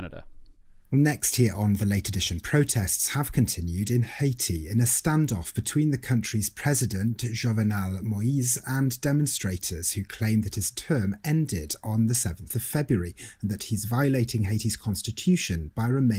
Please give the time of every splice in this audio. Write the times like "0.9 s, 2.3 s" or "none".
none

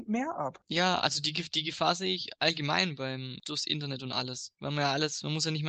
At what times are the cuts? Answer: none

